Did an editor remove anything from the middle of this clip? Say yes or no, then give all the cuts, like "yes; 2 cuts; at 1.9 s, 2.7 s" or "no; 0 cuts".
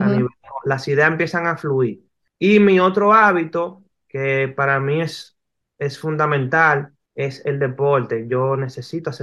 no; 0 cuts